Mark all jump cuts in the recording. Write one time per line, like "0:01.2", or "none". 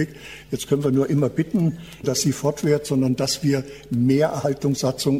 0:02.0

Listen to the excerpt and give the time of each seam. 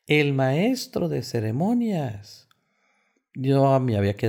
none

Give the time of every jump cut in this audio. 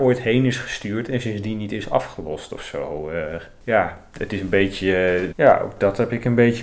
0:05.3

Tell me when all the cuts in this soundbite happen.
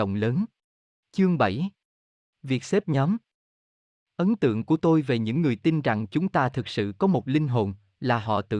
0:01.0

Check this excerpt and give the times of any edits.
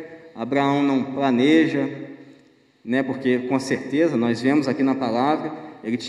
none

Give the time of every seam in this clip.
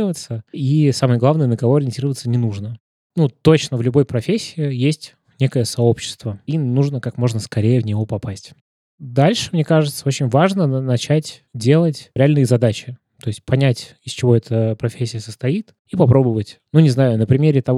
none

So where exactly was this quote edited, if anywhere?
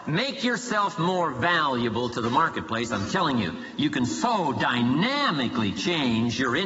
none

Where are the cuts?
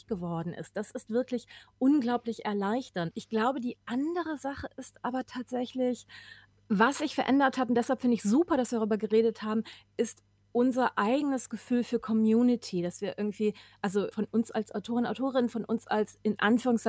0:03.1
0:14.1

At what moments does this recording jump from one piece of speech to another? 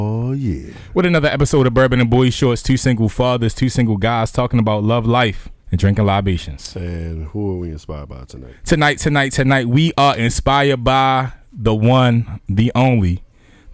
0:05.6

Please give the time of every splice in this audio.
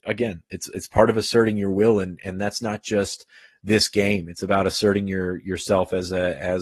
none

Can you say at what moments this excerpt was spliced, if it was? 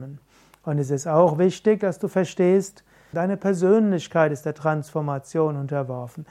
0:03.1

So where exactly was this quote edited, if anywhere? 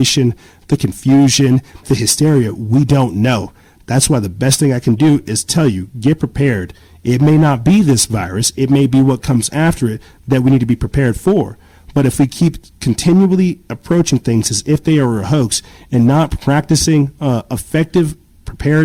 0:01.8

